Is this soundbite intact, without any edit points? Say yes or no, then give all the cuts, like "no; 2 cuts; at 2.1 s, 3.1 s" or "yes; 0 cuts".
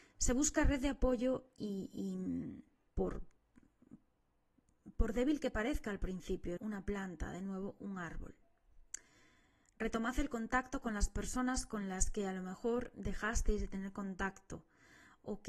no; 2 cuts; at 2.9 s, 6.6 s